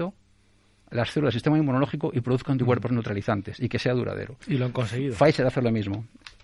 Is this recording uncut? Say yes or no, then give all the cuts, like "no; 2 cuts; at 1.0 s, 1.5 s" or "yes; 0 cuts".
yes; 0 cuts